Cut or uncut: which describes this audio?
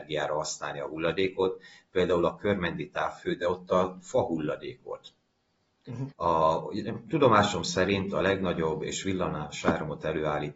cut